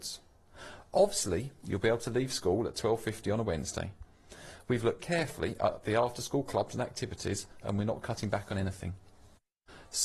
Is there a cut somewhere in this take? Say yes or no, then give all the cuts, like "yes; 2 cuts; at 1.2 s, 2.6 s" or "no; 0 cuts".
yes; 2 cuts; at 5.0 s, 7.6 s